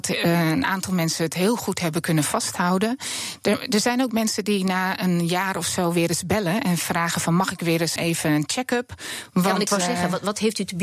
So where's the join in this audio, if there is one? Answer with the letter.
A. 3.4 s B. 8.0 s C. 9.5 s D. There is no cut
B